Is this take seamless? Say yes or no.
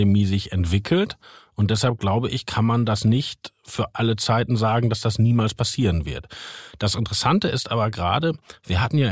yes